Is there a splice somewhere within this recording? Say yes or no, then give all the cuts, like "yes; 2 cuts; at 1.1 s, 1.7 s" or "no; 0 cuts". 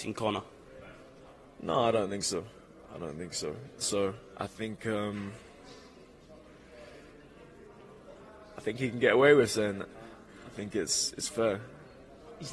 yes; 1 cut; at 3.8 s